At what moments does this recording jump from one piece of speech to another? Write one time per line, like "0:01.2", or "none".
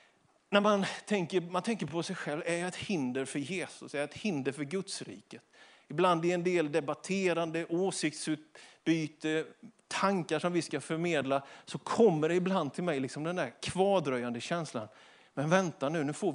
none

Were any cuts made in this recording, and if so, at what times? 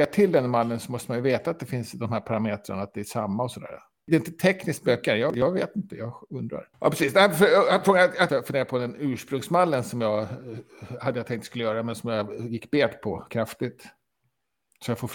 0:06.7
0:08.3

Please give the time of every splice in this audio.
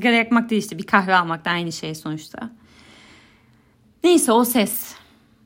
none

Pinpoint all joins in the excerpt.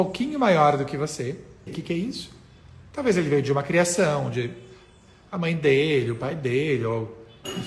0:01.7

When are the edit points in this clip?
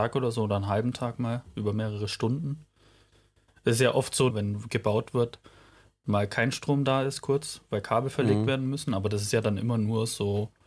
0:04.3

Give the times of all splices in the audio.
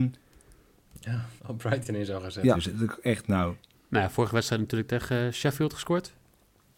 0:01.4
0:02.5
0:03.7

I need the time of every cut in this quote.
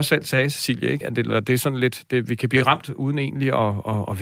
0:01.0

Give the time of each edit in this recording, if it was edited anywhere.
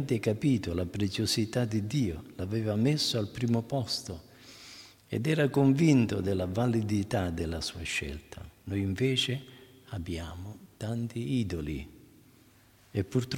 none

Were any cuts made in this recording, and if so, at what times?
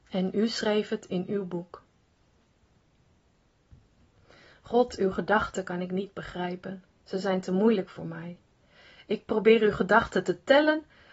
none

